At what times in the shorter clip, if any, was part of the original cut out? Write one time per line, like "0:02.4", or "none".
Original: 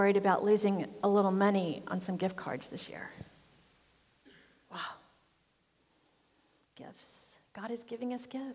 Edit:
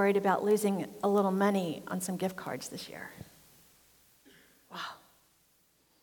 none